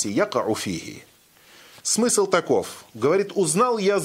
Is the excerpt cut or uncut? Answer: uncut